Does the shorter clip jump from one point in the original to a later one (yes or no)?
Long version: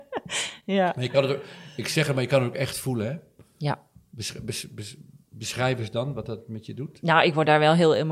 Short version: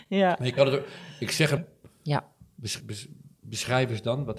yes